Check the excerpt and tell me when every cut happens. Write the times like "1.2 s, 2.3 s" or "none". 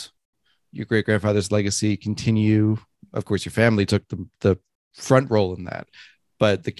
none

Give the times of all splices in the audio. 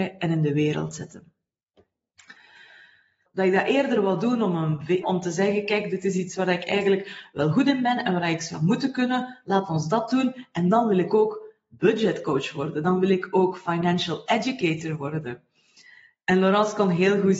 3.3 s, 5.0 s

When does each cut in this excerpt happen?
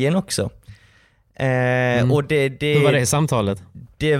none

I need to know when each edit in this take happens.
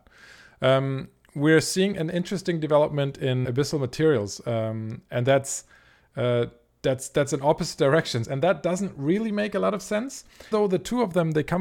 3.4 s, 8.2 s, 10.5 s

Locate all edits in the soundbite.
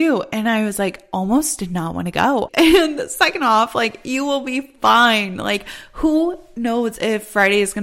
2.5 s

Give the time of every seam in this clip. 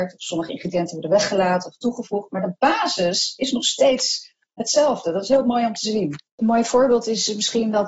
6.3 s

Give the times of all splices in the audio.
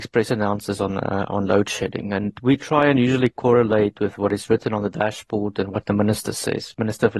none

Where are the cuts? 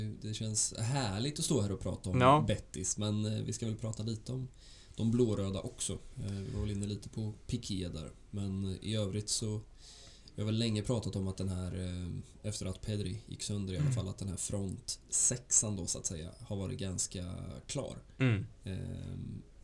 none

